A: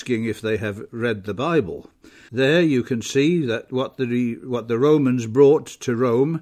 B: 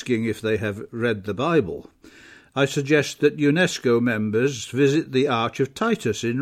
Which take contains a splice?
A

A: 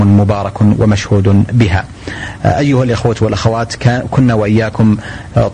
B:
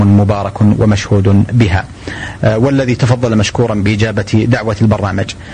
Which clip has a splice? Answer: B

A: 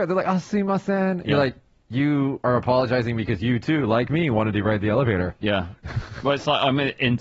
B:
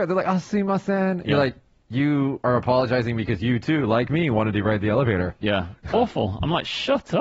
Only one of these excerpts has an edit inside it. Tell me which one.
B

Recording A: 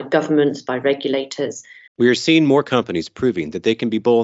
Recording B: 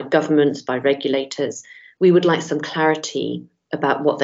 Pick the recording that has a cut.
A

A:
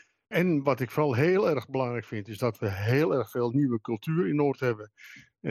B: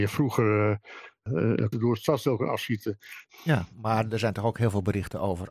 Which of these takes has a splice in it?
B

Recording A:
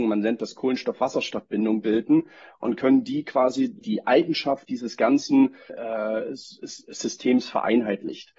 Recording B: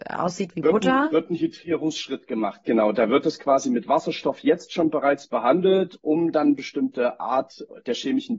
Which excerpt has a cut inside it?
A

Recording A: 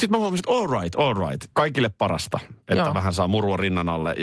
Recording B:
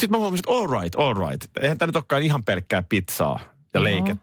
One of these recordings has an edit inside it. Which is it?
A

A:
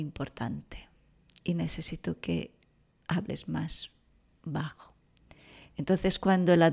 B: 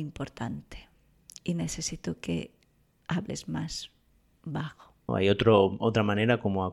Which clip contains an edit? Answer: B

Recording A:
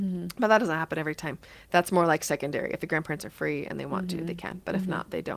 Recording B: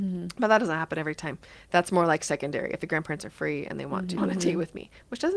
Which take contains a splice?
B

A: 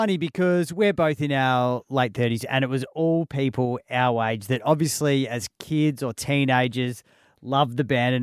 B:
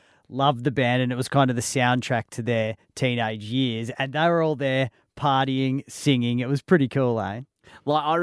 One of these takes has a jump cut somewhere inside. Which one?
A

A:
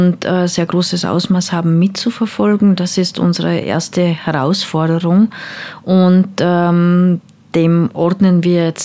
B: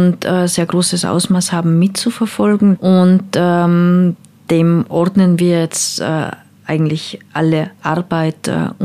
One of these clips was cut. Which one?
B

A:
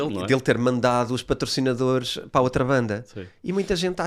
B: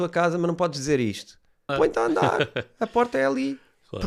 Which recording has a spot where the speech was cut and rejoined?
B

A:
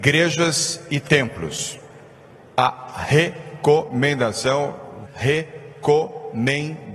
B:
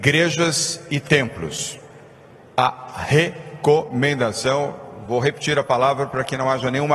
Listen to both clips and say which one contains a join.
A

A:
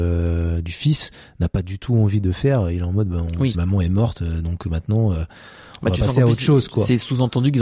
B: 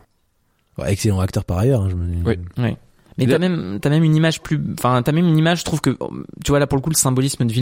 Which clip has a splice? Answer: A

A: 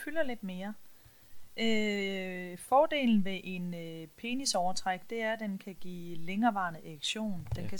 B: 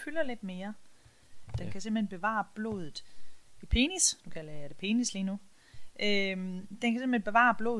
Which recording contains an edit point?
B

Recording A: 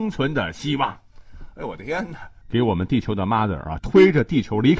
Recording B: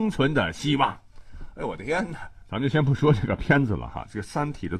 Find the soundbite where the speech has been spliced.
A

